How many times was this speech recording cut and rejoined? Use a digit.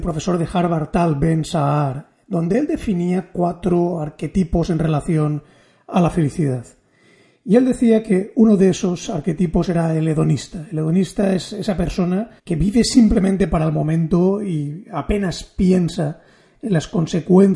1